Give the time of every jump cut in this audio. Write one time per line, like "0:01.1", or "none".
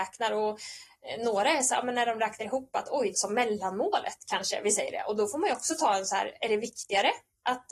0:03.1